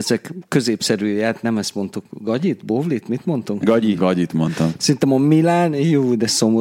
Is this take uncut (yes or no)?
yes